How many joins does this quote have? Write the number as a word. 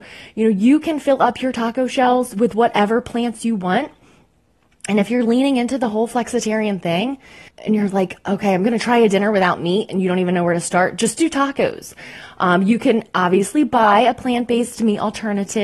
one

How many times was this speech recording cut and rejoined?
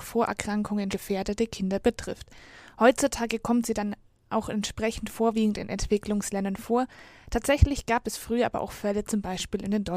one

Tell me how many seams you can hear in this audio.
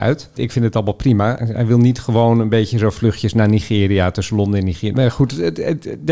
one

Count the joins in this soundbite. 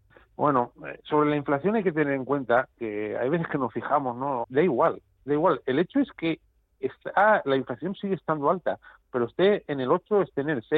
one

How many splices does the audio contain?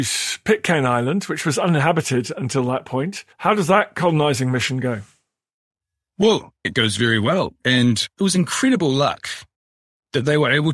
three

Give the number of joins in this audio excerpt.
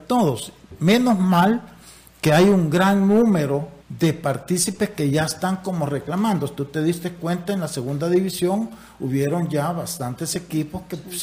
one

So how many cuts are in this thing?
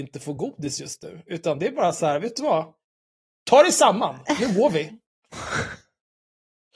zero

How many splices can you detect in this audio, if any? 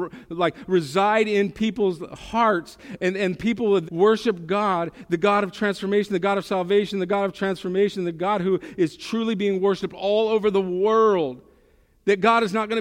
one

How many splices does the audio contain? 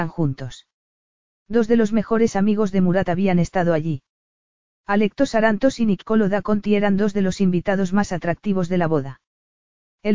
zero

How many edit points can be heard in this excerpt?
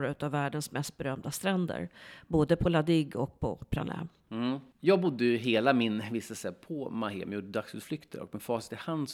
zero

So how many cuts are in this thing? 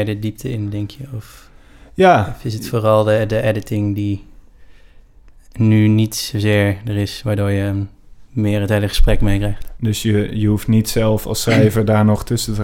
one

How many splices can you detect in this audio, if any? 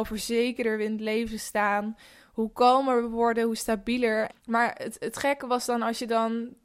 one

